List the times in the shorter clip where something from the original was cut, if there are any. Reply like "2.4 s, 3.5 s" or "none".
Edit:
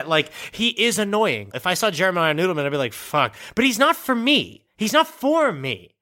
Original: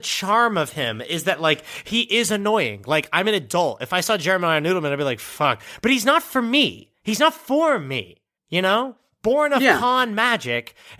1.5 s